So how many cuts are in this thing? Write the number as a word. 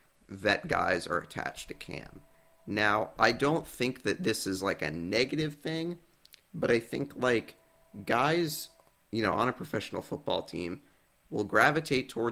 zero